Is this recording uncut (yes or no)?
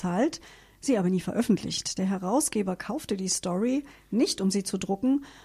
yes